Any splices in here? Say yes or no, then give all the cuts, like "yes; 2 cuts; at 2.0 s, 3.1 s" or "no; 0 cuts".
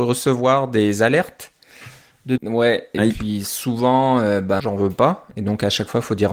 yes; 2 cuts; at 2.4 s, 4.6 s